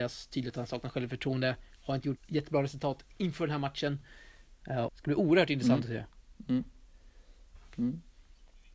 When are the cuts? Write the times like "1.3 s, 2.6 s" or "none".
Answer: 2.2 s, 4.9 s